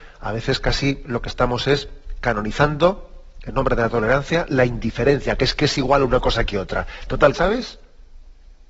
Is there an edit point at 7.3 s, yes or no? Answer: yes